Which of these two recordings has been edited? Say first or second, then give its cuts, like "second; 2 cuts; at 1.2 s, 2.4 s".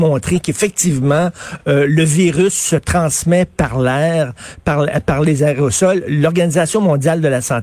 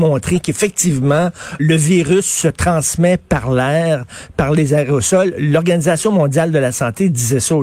second; 2 cuts; at 1.6 s, 4.3 s